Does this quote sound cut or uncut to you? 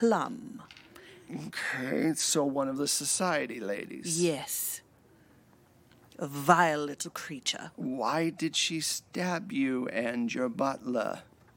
uncut